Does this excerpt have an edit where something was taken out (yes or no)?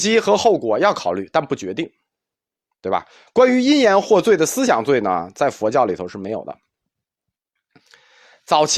no